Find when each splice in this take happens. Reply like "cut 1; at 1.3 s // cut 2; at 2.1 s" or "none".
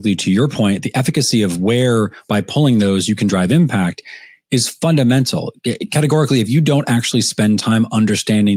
none